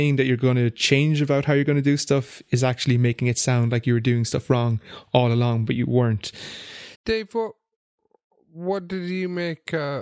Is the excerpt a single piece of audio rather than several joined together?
no; 1 cut; at 6.9 s

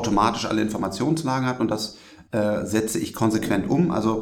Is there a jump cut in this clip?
no; 0 cuts

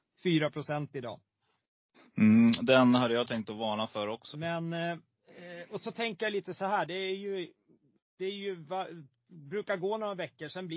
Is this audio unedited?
no; 1 cut; at 4.3 s

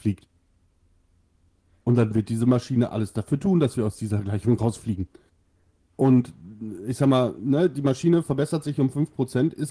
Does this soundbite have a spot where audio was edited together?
yes; 1 cut; at 5.8 s

